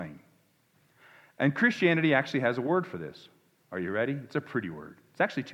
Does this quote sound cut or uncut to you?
uncut